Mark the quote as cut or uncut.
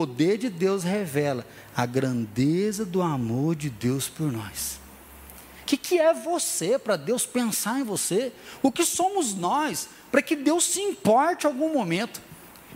cut